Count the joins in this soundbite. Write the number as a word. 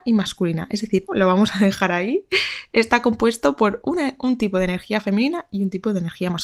one